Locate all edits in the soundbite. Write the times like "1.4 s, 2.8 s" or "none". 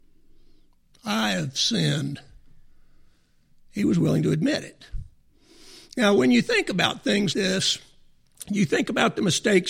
7.3 s